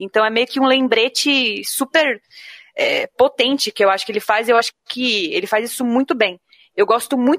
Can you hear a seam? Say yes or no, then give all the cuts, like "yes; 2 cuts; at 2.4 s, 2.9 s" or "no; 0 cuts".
no; 0 cuts